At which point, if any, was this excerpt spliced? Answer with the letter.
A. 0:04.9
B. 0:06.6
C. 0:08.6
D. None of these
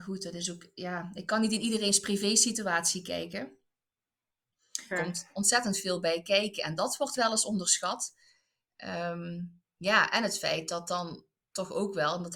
A